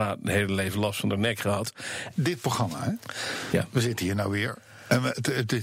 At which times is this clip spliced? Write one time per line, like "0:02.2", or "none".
0:02.1